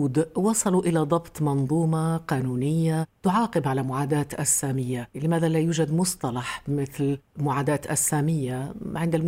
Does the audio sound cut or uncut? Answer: cut